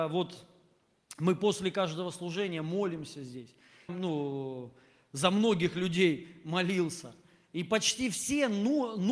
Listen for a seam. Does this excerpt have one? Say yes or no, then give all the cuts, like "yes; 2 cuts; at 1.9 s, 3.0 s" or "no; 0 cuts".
yes; 1 cut; at 3.9 s